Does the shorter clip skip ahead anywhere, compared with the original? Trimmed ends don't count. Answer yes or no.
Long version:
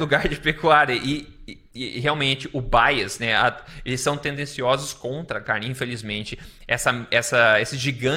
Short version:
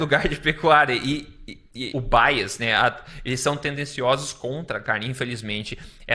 yes